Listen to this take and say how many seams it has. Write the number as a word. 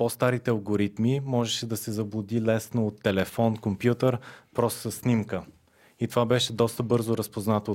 zero